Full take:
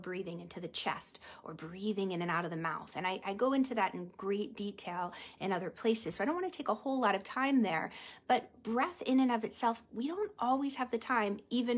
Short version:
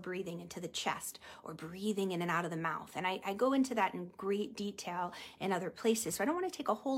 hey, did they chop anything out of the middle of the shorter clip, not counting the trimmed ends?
no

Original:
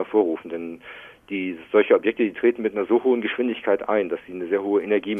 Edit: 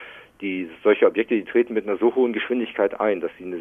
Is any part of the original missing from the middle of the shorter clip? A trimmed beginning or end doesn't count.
no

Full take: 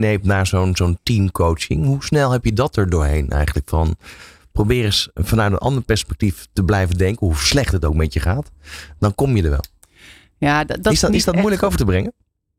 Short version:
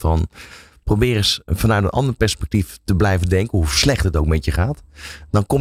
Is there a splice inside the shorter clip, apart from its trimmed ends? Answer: no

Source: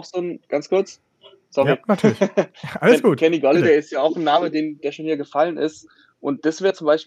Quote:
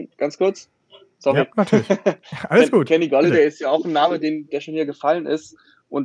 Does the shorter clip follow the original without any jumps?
yes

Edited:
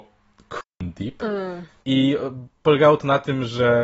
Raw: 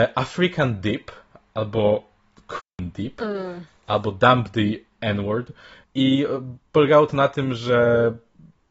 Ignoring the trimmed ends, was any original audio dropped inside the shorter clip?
yes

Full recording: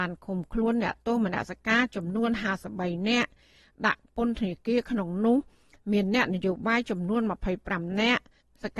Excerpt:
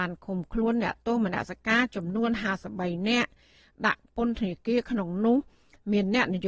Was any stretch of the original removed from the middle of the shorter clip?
no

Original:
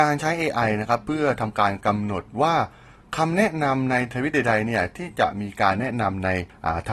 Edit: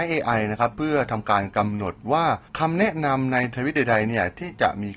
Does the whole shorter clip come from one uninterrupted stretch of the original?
no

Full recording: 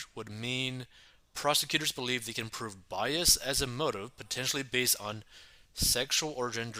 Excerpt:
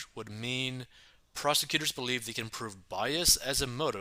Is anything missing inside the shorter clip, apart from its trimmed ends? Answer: no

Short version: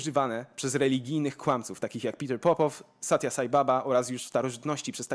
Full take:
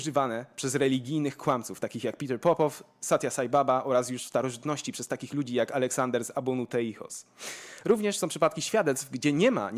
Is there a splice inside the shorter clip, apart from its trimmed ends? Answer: no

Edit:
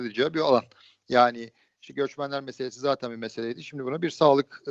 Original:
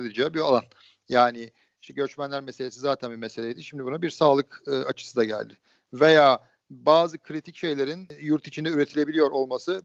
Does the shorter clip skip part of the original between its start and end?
no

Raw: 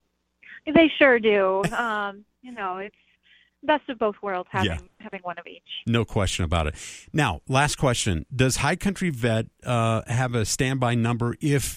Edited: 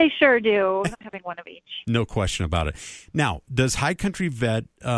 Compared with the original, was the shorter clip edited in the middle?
yes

